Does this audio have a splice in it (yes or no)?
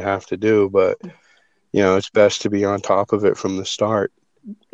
no